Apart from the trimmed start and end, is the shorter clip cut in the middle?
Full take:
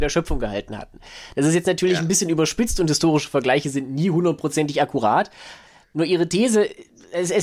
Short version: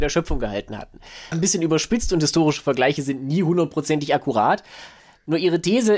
yes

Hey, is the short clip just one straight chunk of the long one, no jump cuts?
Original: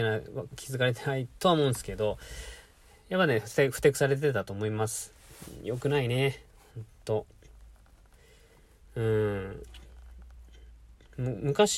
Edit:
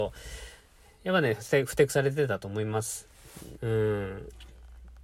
no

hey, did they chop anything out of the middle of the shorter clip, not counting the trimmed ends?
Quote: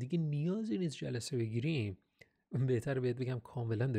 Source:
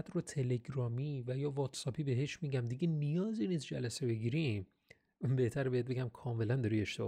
no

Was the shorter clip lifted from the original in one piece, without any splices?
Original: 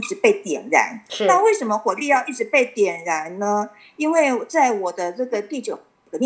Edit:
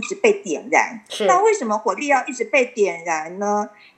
yes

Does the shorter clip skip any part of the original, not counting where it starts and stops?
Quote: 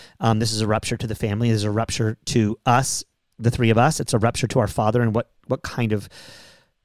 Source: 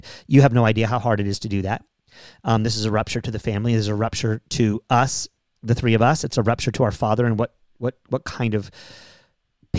yes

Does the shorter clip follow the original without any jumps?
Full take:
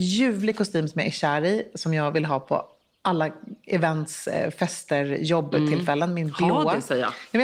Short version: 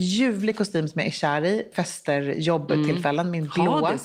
no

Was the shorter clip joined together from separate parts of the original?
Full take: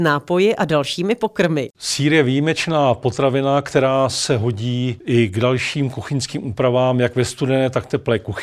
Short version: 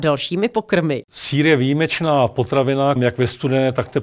yes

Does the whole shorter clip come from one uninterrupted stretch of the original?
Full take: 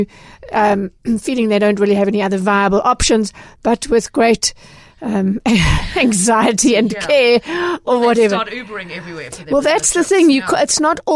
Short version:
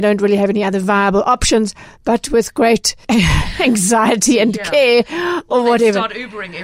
no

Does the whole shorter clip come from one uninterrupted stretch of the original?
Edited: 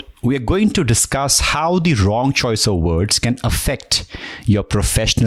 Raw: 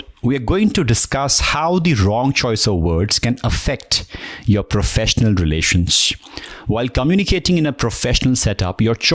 yes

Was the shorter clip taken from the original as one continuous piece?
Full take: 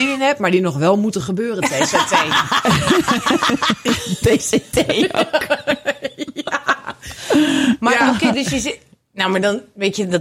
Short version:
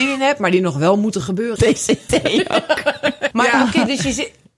no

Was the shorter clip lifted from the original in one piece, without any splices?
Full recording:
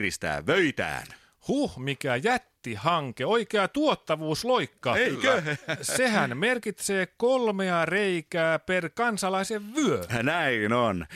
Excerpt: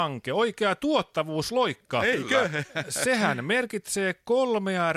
yes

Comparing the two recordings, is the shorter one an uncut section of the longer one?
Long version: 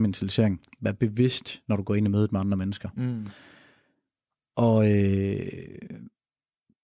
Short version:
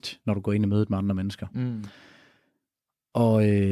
yes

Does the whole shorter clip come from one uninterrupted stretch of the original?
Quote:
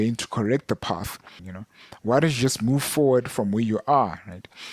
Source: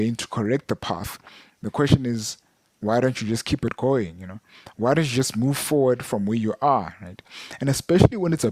no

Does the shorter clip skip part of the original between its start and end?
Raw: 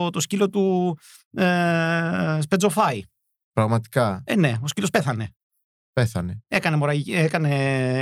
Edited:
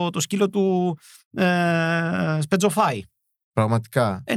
no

